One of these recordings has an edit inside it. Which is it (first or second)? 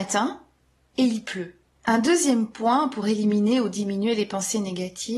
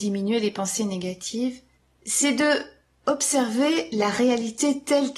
first